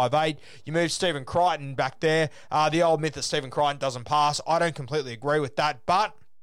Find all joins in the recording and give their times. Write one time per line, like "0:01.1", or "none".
none